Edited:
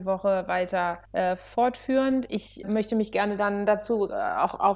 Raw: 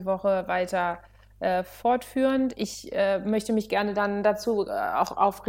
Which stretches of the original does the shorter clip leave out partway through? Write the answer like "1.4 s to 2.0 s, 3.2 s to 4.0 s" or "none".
1.0 s to 1.3 s, 2.9 s to 3.2 s